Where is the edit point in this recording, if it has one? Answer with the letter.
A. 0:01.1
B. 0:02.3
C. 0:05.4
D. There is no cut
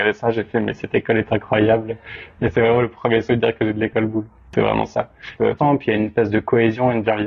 C